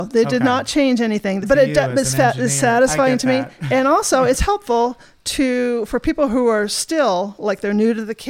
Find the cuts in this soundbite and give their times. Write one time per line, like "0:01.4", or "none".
0:01.4